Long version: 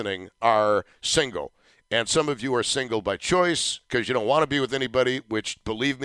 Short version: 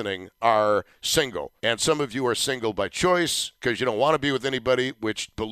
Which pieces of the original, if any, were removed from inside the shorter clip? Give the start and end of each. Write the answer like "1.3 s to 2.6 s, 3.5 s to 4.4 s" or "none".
1.6 s to 1.9 s